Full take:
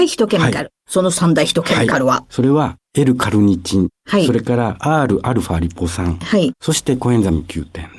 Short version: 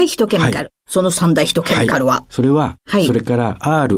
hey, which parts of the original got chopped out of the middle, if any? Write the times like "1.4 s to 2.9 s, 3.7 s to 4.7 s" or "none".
2.8 s to 4.0 s